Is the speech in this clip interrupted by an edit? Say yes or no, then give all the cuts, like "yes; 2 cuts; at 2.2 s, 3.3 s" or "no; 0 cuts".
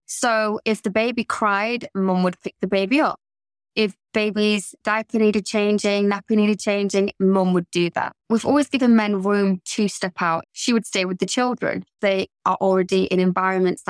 yes; 2 cuts; at 10.4 s, 12.0 s